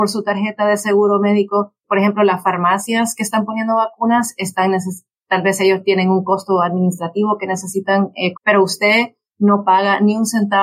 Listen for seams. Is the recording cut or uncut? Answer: cut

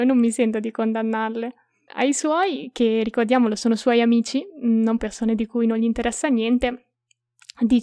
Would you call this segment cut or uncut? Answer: cut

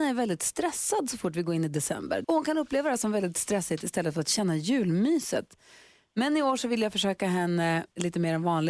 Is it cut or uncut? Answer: cut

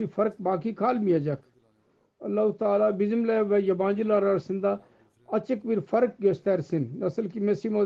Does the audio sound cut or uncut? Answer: uncut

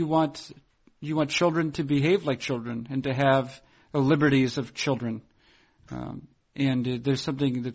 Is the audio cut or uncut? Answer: uncut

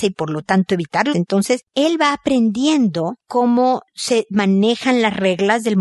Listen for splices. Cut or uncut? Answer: cut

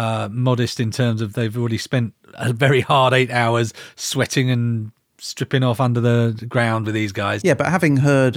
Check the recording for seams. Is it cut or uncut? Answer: cut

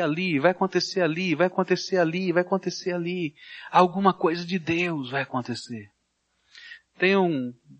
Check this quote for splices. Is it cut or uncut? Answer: uncut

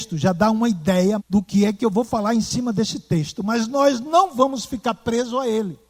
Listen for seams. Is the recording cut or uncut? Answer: cut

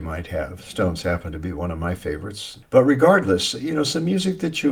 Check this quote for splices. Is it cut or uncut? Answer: cut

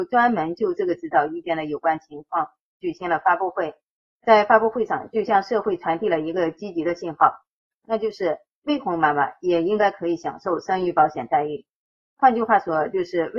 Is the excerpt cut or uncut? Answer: uncut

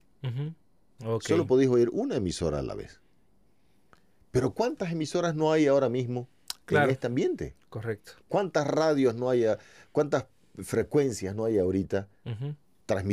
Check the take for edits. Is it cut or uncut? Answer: cut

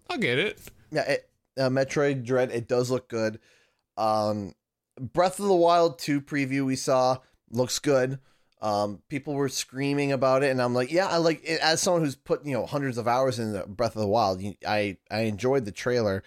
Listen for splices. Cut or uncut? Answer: uncut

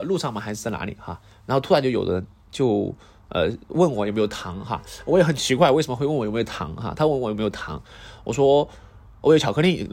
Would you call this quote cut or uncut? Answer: uncut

